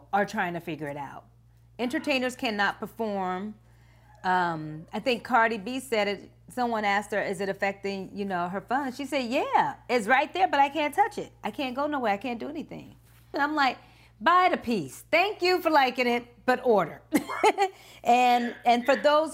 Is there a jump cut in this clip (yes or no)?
yes